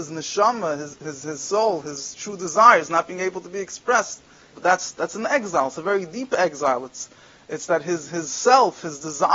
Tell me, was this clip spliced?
yes; 1 cut; at 4.5 s

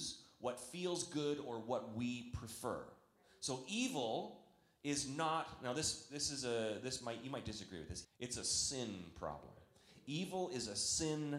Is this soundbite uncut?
no; 1 cut; at 8.0 s

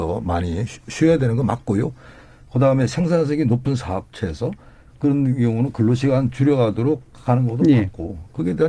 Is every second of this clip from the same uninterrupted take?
yes; 0 cuts

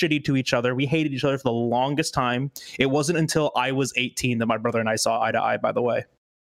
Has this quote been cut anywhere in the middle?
no; 0 cuts

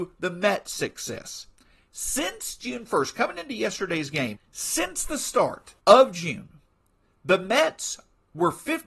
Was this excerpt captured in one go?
no; 2 cuts; at 4.3 s, 5.8 s

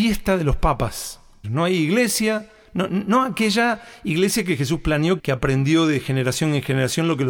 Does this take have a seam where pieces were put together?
yes; 2 cuts; at 1.4 s, 5.2 s

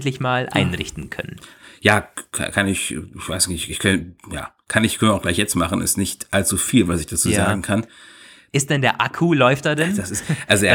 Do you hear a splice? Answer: no; 0 cuts

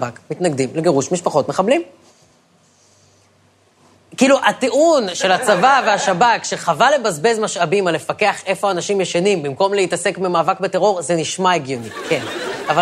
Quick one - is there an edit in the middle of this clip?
no; 0 cuts

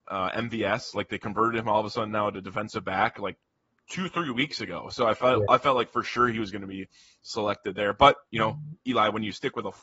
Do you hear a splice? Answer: no; 0 cuts

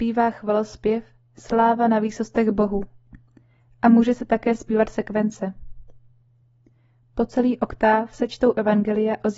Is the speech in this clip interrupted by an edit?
no; 0 cuts

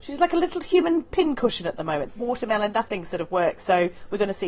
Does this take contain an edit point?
yes; 1 cut; at 2.1 s

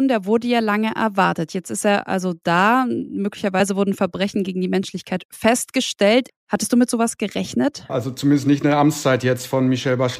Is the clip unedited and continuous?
no; 2 cuts; at 6.3 s, 7.9 s

